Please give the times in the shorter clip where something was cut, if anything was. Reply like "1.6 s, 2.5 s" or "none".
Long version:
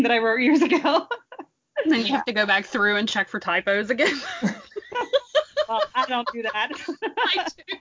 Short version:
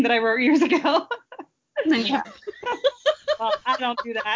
2.2 s